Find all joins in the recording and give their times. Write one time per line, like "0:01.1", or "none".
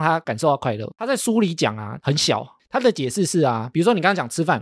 0:02.0